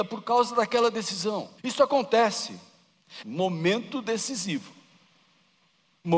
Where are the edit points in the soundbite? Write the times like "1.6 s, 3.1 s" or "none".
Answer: 1.6 s, 3.2 s